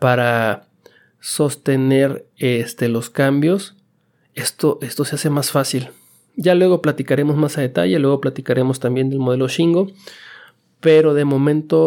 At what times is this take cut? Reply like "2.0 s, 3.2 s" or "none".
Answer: none